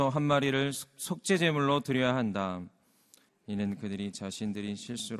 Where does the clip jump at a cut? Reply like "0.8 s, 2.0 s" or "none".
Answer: 3.3 s

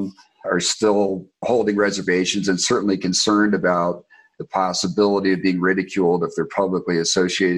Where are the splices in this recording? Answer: none

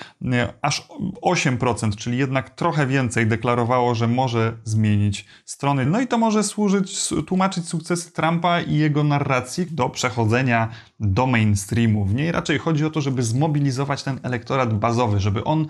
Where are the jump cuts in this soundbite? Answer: 5.8 s, 9.7 s

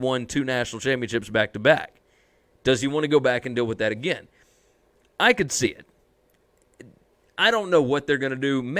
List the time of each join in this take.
none

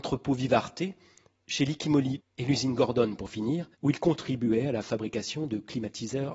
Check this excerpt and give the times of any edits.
2.2 s, 3.7 s

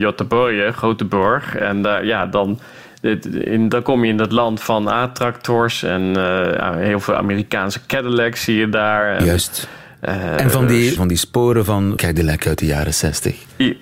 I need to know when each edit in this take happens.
11.0 s, 12.0 s

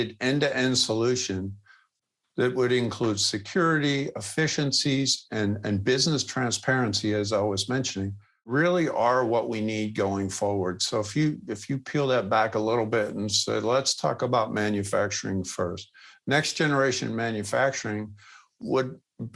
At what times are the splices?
none

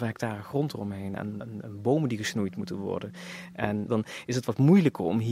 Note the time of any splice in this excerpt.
1.4 s, 3.9 s

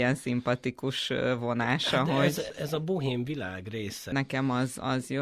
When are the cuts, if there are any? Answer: 2.5 s, 4.1 s

